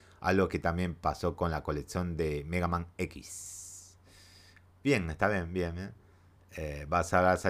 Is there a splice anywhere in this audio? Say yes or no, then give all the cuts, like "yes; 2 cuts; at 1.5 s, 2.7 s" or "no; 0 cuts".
no; 0 cuts